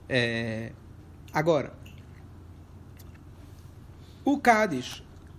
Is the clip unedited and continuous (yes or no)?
yes